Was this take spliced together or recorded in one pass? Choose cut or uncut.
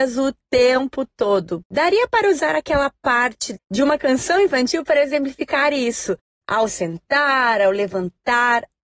cut